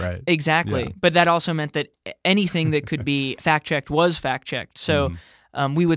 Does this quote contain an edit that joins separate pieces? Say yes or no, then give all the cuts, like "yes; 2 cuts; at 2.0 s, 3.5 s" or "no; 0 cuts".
yes; 1 cut; at 3.4 s